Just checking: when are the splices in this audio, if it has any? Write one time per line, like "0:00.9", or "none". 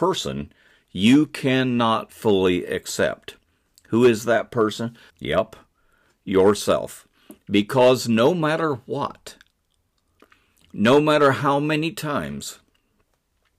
0:05.1